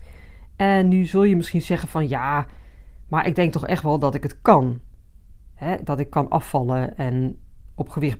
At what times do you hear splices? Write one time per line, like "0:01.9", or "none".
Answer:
none